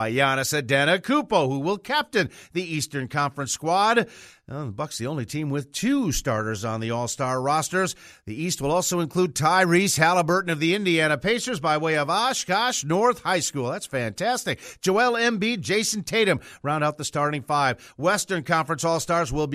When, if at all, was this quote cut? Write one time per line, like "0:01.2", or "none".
none